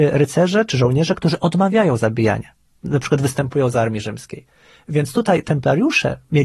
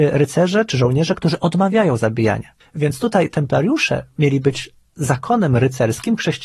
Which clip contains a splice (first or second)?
second